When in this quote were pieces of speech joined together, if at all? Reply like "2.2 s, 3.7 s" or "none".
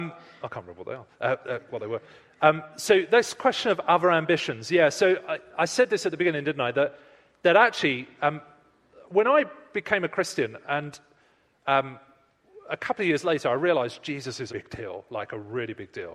14.5 s